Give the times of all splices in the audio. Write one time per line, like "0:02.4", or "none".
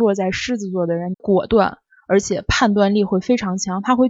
0:01.1